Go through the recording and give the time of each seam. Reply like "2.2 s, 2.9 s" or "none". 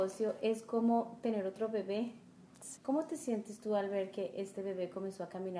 2.8 s